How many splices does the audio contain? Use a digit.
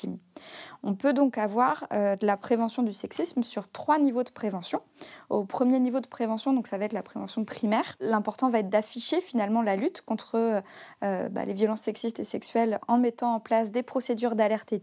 0